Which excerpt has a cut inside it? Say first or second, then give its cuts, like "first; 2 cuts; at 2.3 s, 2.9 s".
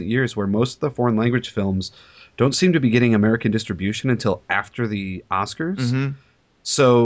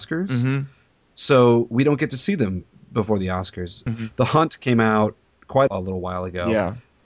second; 2 cuts; at 3.9 s, 5.7 s